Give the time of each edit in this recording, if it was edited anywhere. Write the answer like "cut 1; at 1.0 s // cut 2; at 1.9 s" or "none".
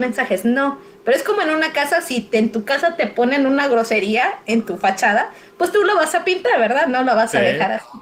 none